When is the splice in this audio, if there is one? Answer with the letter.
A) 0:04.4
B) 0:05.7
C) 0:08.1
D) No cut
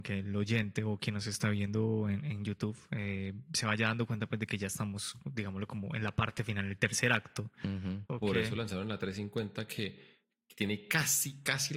C